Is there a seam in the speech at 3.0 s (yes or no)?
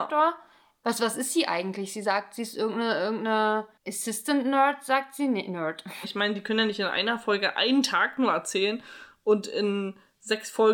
no